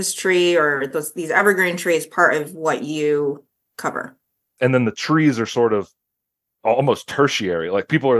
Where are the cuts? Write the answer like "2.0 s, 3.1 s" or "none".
4.6 s